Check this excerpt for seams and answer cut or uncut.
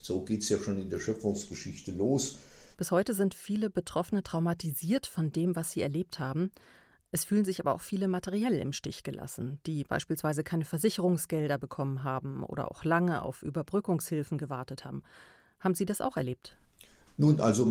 cut